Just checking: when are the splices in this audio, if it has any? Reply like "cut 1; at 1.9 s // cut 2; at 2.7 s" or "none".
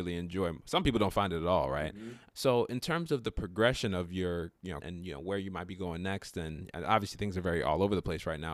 cut 1; at 2.3 s // cut 2; at 4.8 s